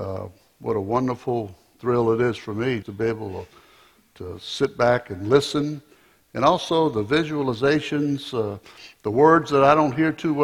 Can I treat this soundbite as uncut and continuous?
no; 1 cut; at 2.8 s

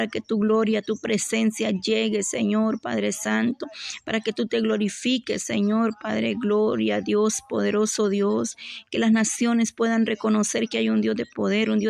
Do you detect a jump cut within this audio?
no; 0 cuts

